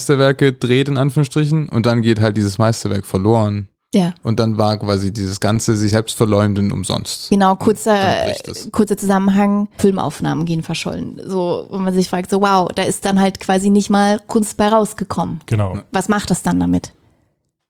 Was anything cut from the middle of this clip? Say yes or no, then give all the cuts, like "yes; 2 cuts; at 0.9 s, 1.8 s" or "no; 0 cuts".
yes; 1 cut; at 9.8 s